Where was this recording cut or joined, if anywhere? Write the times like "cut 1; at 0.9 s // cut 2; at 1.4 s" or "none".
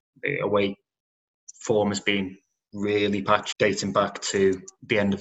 cut 1; at 3.5 s